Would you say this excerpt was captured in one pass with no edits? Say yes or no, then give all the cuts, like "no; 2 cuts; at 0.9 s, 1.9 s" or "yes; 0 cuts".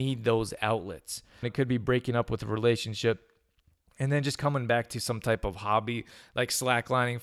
no; 1 cut; at 1.4 s